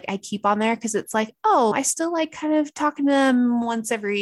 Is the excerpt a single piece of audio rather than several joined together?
no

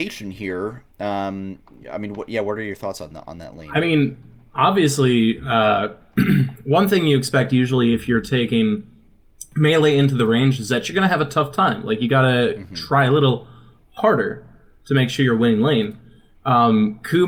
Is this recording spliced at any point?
no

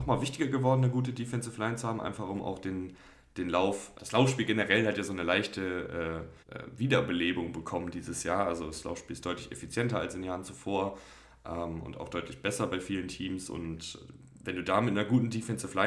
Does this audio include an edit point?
yes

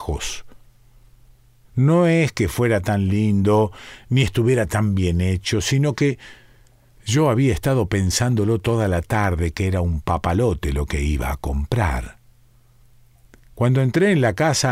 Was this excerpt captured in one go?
no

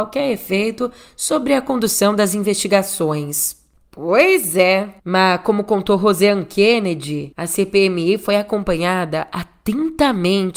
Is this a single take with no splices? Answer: no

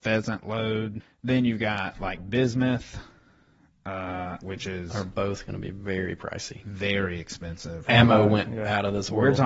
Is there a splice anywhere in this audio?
yes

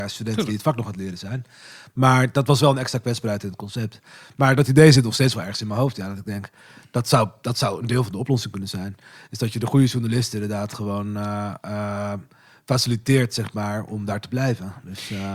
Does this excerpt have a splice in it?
no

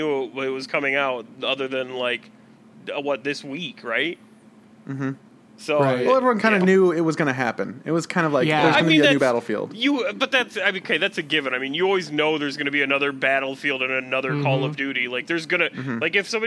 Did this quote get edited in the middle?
no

